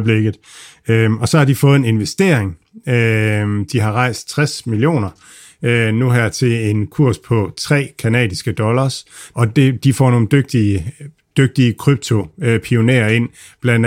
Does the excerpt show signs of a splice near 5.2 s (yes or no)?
no